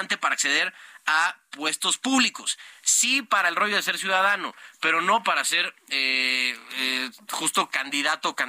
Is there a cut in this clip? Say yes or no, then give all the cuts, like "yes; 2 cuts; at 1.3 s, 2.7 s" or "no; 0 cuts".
no; 0 cuts